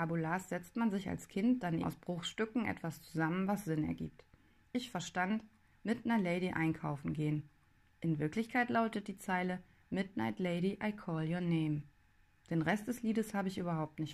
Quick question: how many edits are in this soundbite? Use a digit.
1